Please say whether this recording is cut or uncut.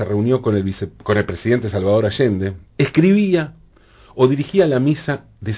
cut